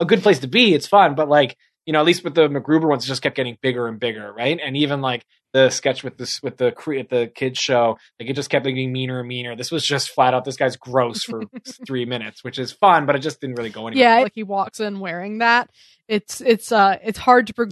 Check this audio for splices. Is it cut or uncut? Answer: cut